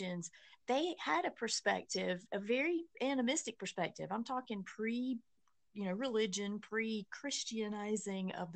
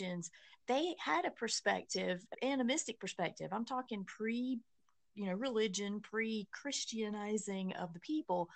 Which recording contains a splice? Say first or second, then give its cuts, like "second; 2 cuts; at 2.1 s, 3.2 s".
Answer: second; 1 cut; at 2.3 s